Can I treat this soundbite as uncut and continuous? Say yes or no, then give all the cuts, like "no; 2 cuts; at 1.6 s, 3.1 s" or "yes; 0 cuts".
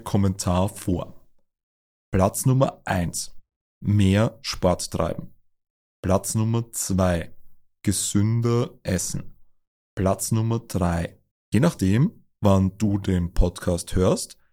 no; 1 cut; at 11.3 s